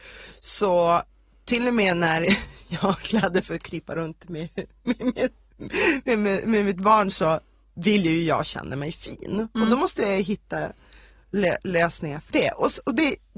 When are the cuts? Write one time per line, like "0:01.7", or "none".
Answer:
none